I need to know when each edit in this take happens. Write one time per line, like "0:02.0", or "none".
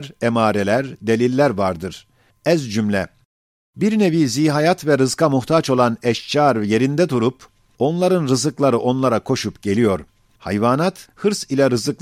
none

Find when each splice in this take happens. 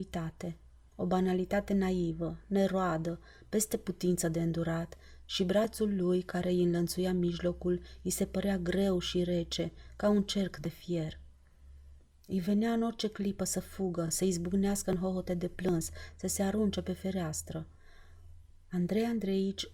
none

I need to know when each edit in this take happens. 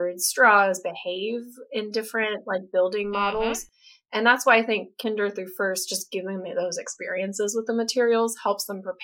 none

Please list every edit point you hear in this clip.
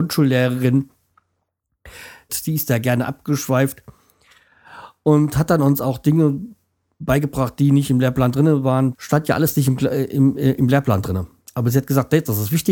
0:02.3
0:08.9

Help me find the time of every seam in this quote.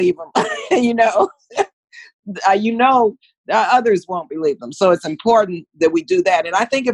none

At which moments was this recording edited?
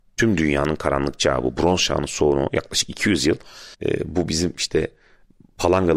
0:03.7

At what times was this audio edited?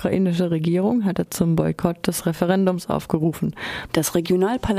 0:03.9

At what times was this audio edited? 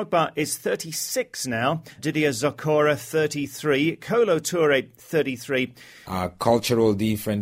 0:02.0
0:06.0

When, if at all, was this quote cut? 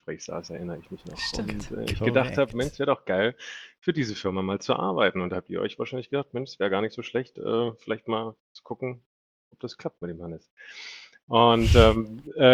none

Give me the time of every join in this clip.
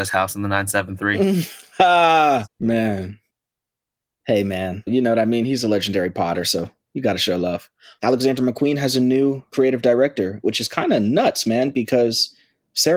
0:02.5
0:04.9
0:08.0

